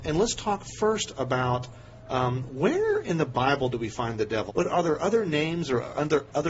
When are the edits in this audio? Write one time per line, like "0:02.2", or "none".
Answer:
0:04.5